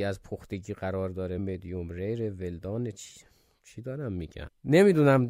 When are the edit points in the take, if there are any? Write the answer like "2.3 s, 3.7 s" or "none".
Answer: 1.4 s